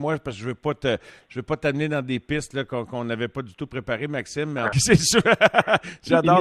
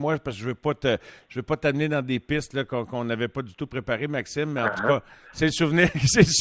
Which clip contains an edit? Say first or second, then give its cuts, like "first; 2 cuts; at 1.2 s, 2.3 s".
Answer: first; 1 cut; at 4.7 s